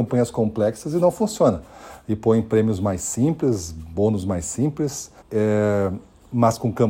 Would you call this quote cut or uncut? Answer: cut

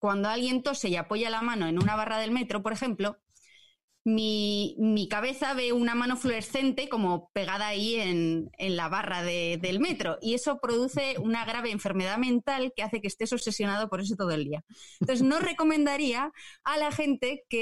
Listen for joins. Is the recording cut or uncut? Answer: uncut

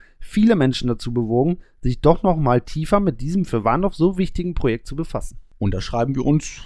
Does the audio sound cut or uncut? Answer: uncut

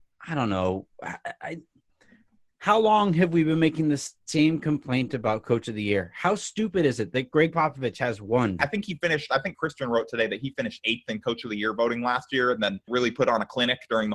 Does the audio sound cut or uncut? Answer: cut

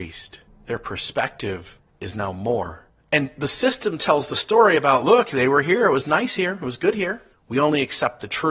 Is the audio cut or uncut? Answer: cut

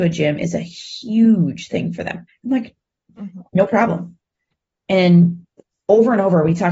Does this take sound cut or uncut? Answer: cut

